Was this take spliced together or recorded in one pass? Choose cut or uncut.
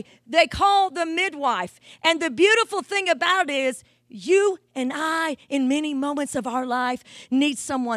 uncut